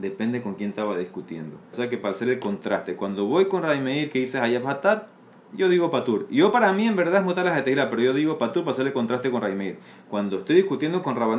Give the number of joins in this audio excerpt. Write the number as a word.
one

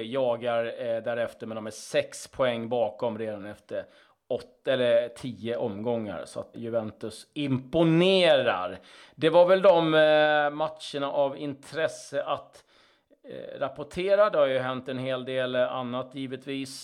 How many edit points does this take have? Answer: one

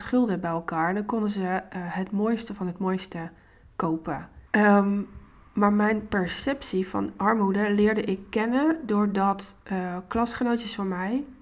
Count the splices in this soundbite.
two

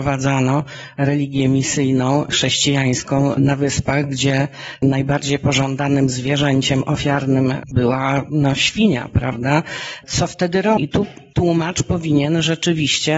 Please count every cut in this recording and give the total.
one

